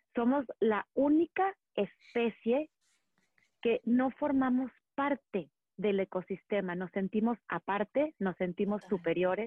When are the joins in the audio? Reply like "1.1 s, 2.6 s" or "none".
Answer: none

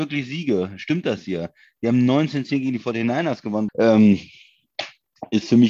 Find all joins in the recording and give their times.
3.7 s

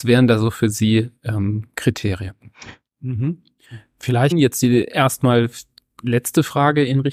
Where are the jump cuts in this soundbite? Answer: 2.9 s, 4.3 s

